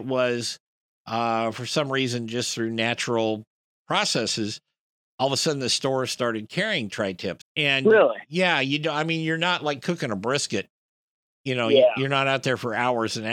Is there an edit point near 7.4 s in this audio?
yes; 1 cut; at 7.4 s

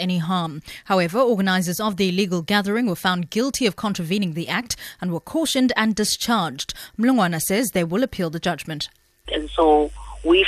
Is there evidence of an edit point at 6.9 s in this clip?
no; 1 cut; at 9.2 s

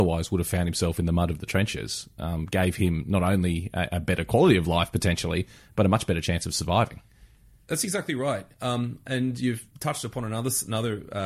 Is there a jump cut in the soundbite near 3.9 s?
no; 1 cut; at 9.7 s

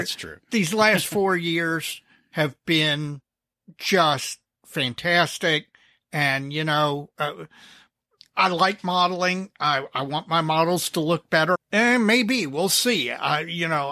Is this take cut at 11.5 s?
yes; 1 cut; at 11.5 s

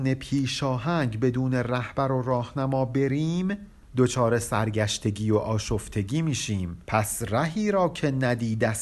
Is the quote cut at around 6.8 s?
yes; 1 cut; at 6.8 s

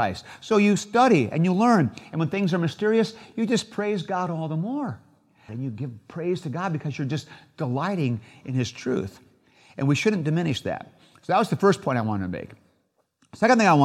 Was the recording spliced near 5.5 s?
yes; 1 cut; at 5.5 s

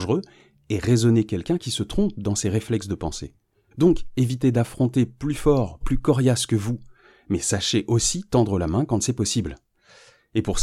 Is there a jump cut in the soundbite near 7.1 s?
no; 2 cuts; at 3.7 s, 5.8 s

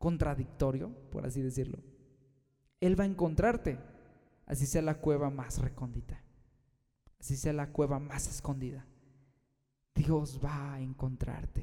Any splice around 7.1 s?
no; 0 cuts

